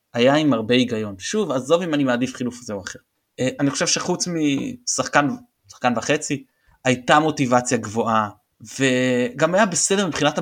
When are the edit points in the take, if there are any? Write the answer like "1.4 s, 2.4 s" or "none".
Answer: 3.6 s